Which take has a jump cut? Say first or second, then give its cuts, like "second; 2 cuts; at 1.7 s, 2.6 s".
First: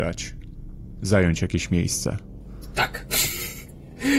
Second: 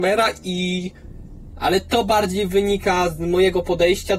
second; 1 cut; at 1.5 s